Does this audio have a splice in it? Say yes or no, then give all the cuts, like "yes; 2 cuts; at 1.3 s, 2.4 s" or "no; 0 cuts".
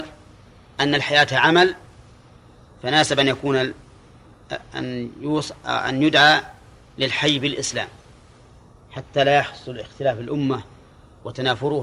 no; 0 cuts